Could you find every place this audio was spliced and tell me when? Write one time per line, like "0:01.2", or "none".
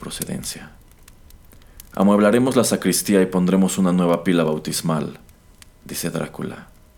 none